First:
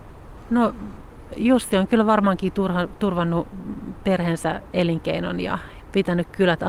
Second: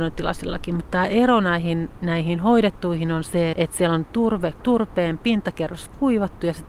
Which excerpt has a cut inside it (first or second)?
second